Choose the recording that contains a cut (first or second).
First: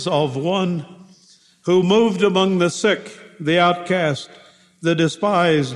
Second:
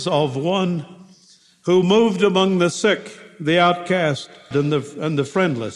second